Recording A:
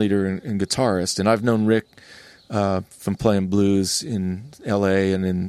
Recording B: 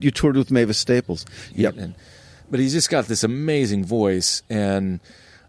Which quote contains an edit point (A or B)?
B